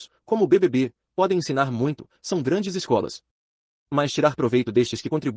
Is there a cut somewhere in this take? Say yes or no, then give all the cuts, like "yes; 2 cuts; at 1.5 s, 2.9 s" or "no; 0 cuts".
no; 0 cuts